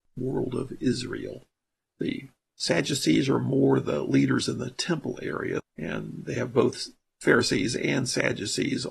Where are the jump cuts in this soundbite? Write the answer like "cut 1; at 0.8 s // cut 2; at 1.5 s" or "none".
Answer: cut 1; at 5.6 s

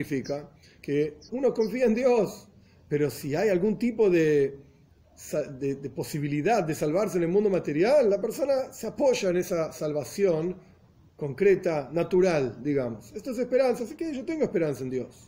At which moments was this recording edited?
cut 1; at 1.3 s

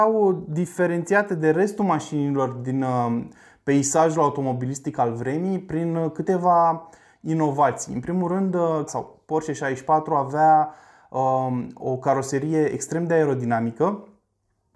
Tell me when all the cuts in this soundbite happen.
cut 1; at 8.9 s

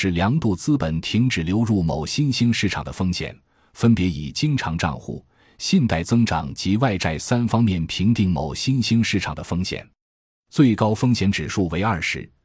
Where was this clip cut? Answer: none

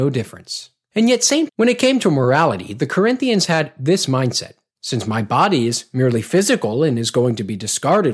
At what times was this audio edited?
cut 1; at 1.5 s

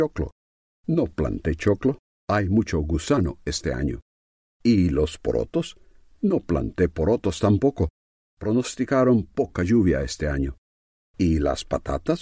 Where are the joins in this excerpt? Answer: none

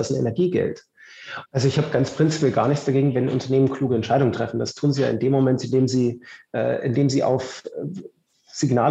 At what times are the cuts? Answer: cut 1; at 1.4 s

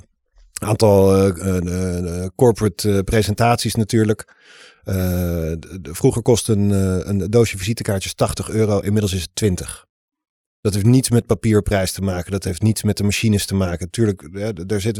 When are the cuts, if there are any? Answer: none

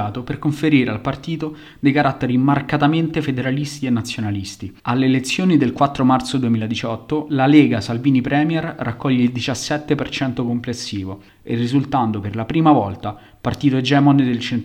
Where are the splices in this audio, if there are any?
cut 1; at 4.8 s // cut 2; at 11.3 s

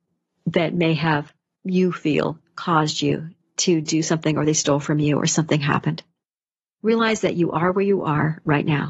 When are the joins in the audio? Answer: none

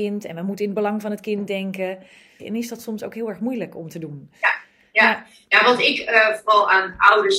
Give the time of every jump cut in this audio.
cut 1; at 2.4 s

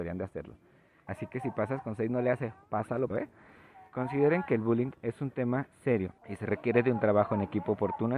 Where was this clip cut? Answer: cut 1; at 1.1 s // cut 2; at 3.1 s // cut 3; at 6.2 s

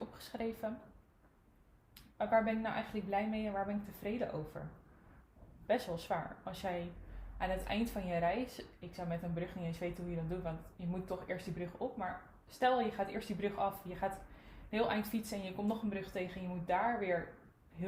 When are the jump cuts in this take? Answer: cut 1; at 2.1 s

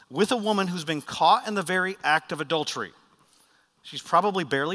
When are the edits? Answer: none

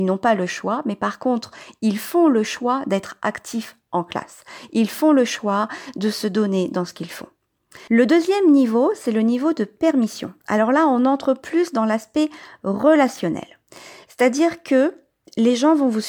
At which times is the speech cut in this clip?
cut 1; at 7.9 s

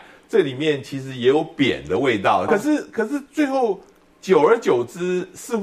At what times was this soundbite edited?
cut 1; at 2.5 s

